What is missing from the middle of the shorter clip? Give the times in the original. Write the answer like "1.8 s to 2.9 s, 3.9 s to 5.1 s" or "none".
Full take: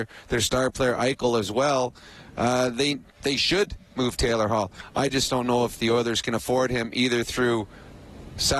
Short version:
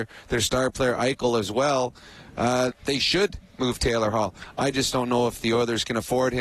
2.7 s to 3.1 s